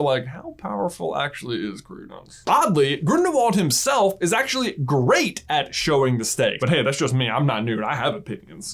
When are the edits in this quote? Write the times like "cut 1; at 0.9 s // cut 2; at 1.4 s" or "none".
cut 1; at 6.6 s